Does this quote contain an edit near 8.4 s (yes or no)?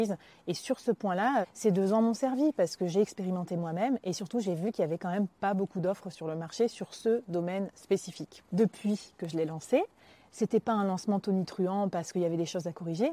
no